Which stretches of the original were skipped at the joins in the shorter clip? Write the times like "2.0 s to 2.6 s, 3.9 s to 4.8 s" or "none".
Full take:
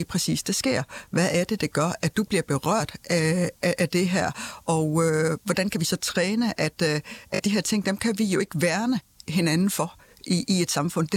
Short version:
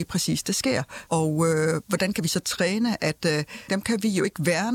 1.1 s to 4.6 s, 7.2 s to 7.8 s